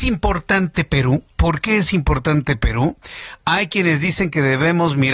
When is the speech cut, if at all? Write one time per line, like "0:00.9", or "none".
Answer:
0:01.3